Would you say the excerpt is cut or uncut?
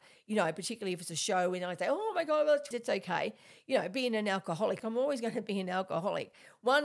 cut